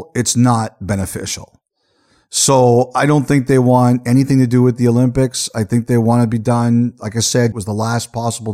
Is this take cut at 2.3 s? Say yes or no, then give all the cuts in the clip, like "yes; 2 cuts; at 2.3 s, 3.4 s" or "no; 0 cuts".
no; 1 cut; at 7.5 s